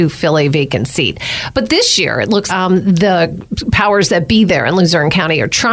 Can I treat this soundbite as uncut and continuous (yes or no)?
no